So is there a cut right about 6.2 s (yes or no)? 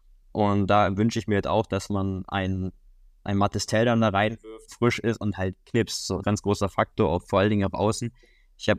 yes